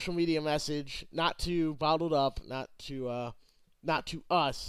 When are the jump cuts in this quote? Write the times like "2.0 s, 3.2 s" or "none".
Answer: none

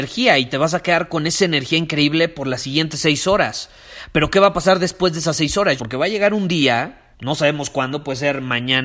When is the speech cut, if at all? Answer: 5.8 s, 7.1 s

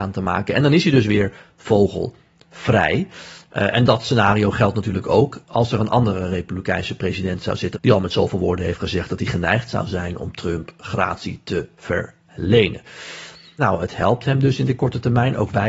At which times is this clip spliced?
7.7 s, 13.6 s

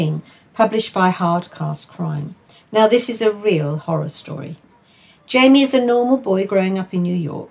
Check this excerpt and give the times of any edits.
none

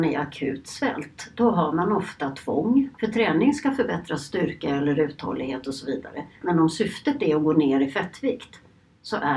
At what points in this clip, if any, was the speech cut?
2.9 s, 6.4 s

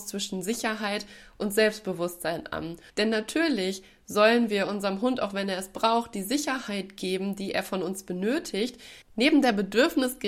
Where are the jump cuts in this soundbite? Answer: 2.9 s, 9.0 s

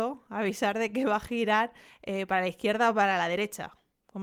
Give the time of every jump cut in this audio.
none

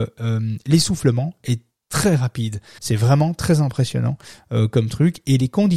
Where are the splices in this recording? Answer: 2.8 s

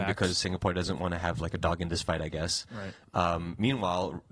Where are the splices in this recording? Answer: none

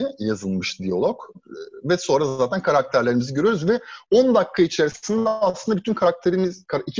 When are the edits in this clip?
1.3 s

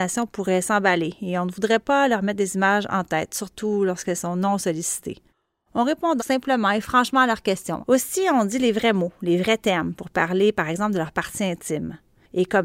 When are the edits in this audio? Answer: 6.2 s, 7.8 s

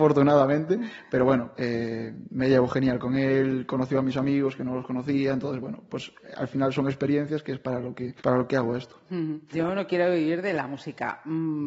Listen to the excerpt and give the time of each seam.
8.2 s, 9.5 s

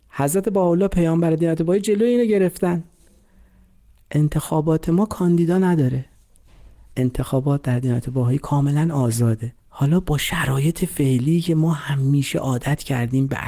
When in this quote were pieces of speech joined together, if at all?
9.6 s

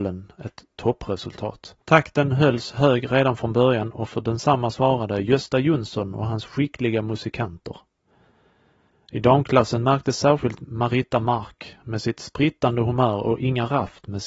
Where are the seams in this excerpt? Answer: 1.8 s

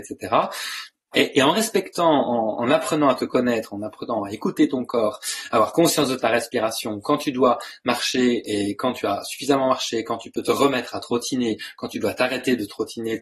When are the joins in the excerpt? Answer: 1.1 s

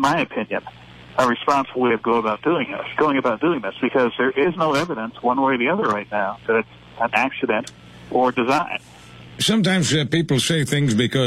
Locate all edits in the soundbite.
none

